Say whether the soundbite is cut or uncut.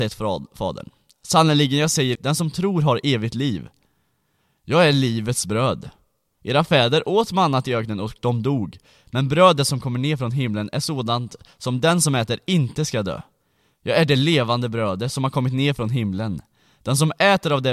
cut